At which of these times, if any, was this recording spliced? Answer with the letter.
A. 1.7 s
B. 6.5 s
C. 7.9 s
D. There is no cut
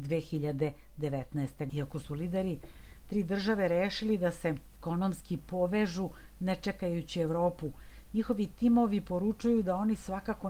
A